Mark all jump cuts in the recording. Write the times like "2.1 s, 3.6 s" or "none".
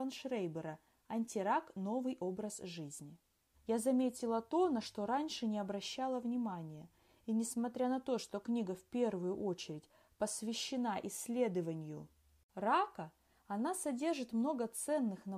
3.5 s